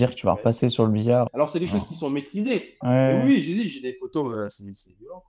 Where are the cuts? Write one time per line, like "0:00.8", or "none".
0:01.3
0:02.8